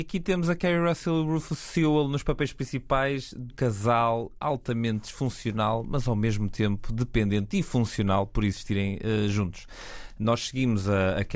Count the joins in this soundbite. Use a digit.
1